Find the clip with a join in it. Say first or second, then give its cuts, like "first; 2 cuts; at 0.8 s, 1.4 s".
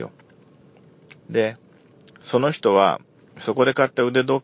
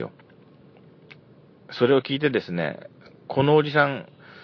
first; 1 cut; at 1.2 s